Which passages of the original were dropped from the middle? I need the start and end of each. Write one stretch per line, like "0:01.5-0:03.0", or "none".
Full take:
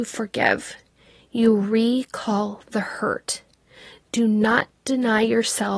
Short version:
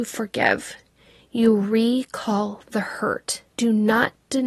0:03.5-0:04.0